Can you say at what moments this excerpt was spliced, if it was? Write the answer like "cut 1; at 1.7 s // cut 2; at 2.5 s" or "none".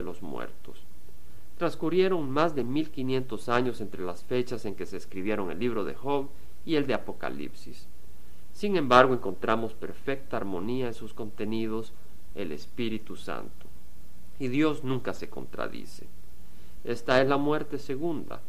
cut 1; at 12.3 s // cut 2; at 16.8 s